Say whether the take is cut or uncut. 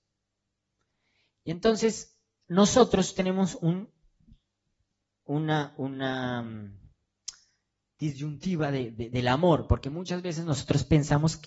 uncut